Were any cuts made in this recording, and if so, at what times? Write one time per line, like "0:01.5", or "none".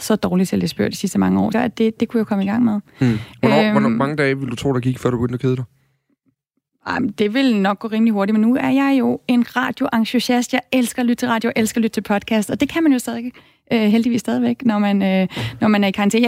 0:01.5